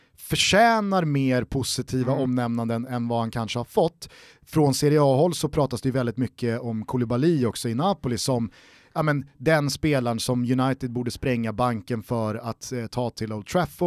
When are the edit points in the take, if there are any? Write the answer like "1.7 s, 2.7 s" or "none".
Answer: none